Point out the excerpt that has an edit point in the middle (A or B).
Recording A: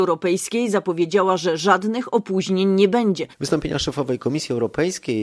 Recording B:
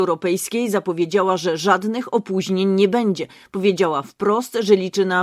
A